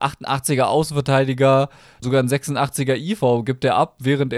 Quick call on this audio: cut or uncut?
cut